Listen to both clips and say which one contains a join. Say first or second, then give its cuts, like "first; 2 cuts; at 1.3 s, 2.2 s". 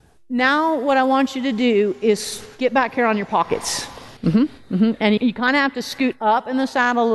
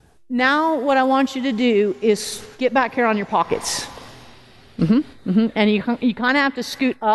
first; 2 cuts; at 4.2 s, 5.2 s